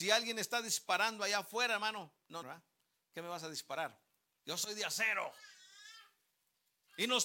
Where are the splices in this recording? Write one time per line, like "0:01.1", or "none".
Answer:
0:02.4
0:04.4

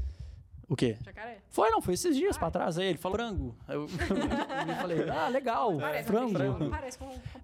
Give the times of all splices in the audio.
0:03.1

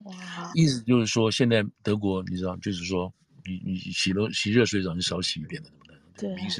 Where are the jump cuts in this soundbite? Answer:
none

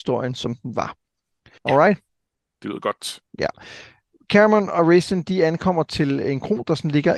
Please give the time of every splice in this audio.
0:01.6

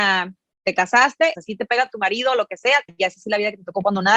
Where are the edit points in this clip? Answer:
0:01.3
0:02.9

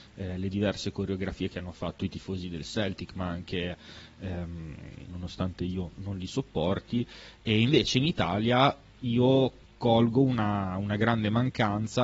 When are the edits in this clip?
0:05.1

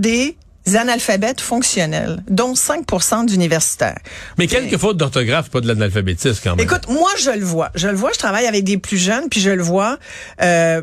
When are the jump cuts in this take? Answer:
0:04.4

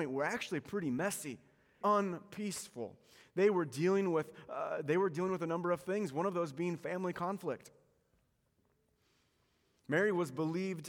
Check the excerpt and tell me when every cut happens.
0:01.8

